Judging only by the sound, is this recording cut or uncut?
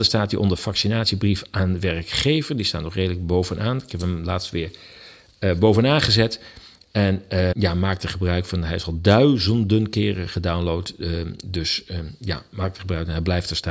cut